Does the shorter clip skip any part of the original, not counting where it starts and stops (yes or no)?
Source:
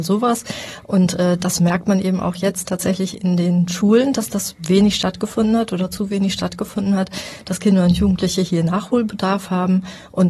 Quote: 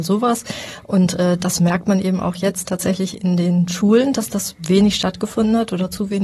no